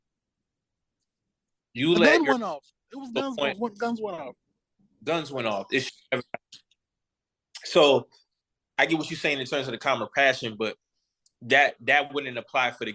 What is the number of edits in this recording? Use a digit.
0